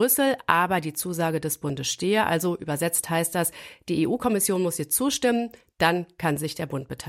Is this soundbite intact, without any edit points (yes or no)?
yes